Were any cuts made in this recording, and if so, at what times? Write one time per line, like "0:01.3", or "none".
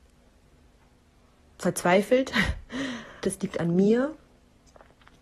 0:03.2